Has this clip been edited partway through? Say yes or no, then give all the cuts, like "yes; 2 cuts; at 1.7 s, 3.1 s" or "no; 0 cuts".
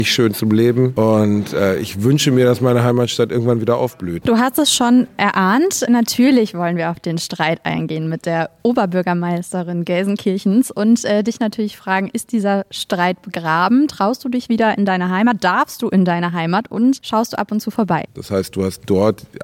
yes; 2 cuts; at 5.9 s, 18.1 s